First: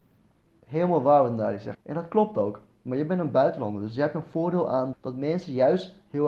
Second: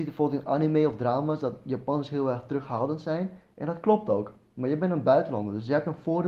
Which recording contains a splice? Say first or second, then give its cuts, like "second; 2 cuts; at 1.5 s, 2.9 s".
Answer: first; 2 cuts; at 1.7 s, 4.9 s